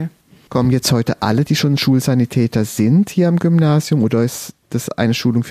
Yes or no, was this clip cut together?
no